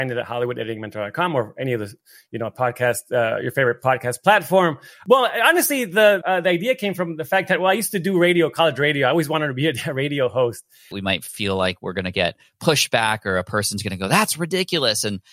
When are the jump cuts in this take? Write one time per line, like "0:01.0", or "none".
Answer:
0:06.2
0:10.9